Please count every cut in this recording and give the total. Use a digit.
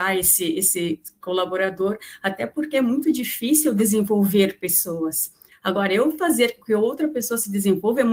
1